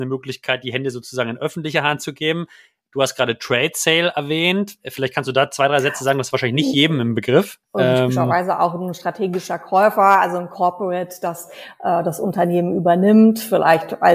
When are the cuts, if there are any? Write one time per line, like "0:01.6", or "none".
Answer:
0:07.6